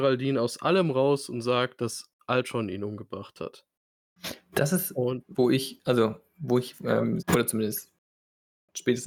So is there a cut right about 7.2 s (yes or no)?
yes